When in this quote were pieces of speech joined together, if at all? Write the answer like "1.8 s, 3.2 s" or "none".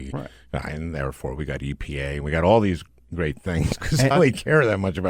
4.1 s